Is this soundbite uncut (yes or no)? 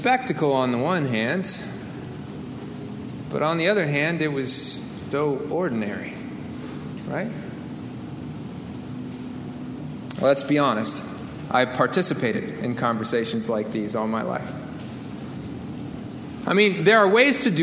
no